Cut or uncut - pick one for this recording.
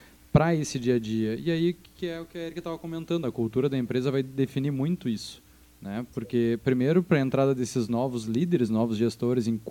uncut